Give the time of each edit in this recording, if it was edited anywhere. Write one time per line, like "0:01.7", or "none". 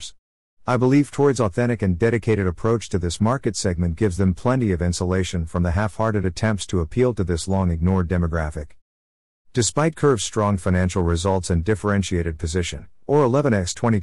0:13.0